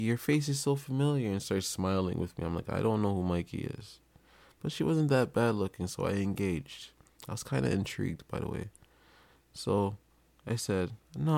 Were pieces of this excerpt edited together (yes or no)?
no